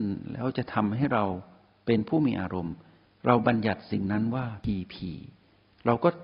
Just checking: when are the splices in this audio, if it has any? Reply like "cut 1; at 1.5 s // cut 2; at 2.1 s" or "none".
none